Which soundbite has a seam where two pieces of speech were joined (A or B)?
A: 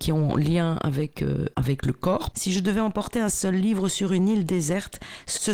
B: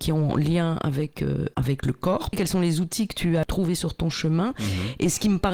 A